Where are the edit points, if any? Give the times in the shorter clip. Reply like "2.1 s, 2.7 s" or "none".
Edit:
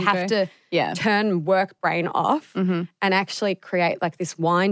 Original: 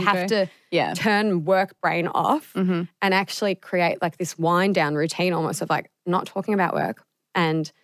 none